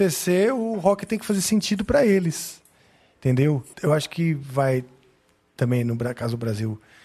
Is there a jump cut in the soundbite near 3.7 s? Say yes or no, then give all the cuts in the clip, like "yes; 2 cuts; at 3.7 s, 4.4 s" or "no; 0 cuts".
yes; 1 cut; at 3.7 s